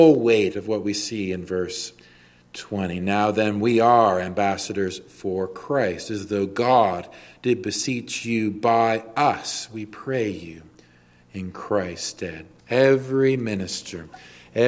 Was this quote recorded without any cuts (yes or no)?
no